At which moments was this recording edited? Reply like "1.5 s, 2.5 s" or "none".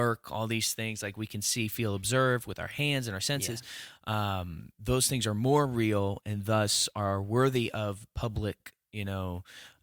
none